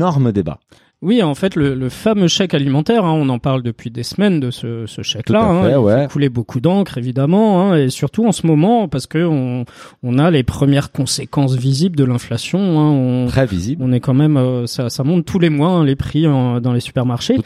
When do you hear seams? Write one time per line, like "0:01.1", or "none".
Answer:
none